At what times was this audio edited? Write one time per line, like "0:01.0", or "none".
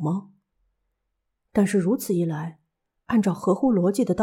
0:01.4